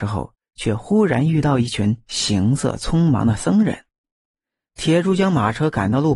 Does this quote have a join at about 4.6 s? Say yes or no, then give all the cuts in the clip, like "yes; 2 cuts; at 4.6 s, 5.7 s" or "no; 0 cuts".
no; 0 cuts